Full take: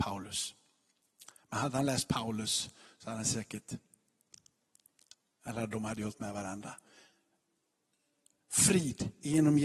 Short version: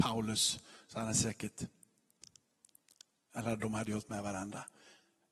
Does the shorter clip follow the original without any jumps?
yes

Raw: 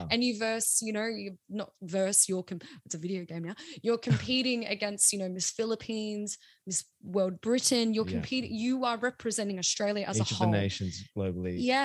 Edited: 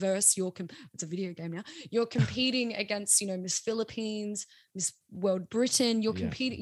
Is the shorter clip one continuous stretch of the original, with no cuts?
yes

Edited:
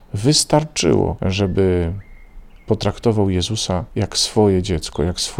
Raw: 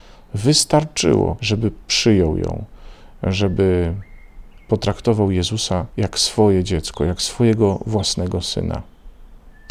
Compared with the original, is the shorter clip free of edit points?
no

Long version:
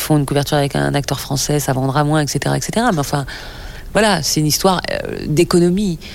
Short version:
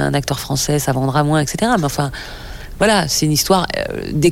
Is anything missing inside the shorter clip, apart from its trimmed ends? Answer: yes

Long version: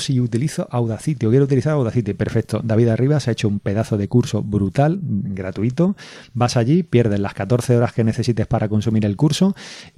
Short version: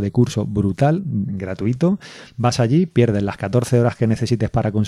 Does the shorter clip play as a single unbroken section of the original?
yes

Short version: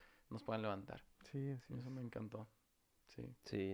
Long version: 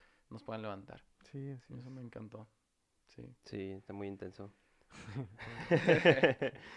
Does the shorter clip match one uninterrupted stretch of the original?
yes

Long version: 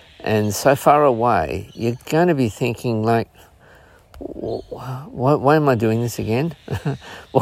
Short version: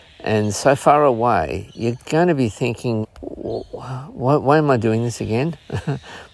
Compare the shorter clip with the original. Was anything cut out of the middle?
yes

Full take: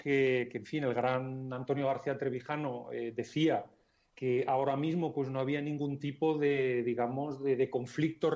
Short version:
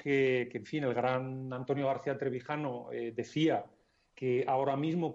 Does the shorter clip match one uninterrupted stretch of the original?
yes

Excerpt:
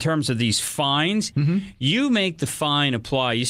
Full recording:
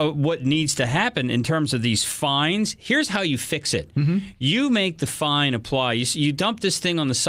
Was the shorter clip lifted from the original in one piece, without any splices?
no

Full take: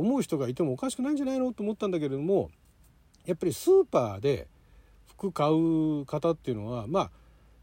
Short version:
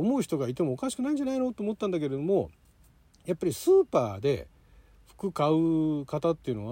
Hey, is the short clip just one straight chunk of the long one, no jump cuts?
yes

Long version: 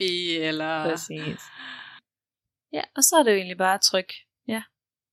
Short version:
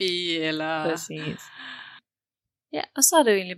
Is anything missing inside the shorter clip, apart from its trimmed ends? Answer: no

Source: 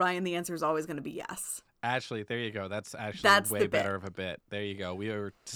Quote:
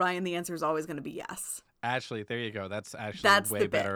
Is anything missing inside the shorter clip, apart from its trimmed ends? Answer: no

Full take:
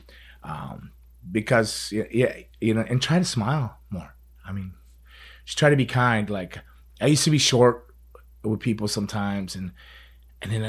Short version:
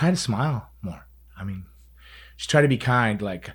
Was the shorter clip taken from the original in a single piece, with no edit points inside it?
yes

